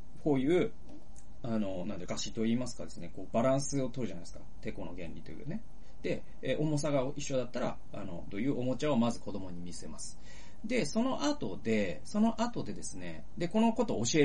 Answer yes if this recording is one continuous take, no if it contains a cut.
no